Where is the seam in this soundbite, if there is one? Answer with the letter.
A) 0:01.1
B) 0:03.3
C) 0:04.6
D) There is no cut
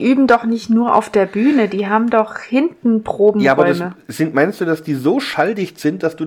D